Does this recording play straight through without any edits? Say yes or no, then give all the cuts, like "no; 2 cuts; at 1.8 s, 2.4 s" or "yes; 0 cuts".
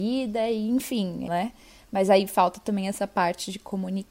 no; 1 cut; at 1.3 s